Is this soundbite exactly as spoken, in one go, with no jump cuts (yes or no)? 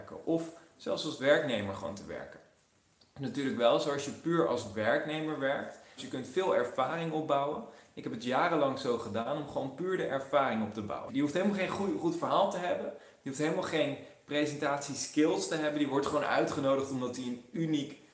no